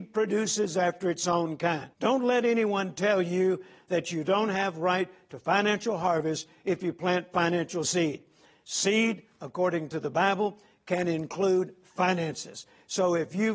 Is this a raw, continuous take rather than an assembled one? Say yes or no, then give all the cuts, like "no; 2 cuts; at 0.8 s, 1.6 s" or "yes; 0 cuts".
no; 1 cut; at 1.9 s